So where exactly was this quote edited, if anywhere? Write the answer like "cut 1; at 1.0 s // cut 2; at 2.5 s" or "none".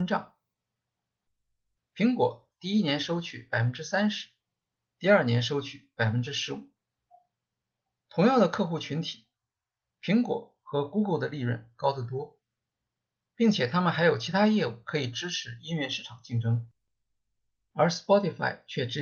none